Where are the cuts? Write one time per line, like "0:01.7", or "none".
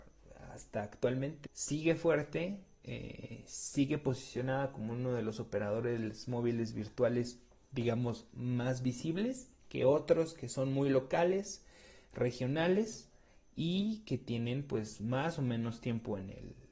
0:01.5